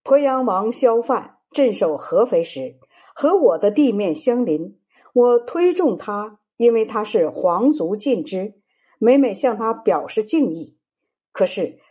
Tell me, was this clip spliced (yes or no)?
no